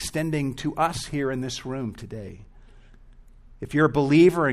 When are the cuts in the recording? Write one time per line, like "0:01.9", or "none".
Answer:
none